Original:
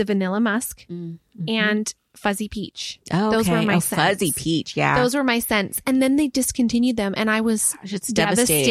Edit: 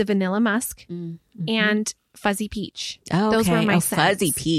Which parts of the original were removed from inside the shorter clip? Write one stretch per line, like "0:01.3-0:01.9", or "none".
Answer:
none